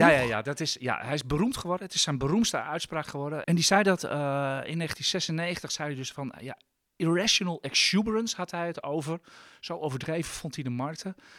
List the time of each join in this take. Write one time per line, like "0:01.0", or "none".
0:03.4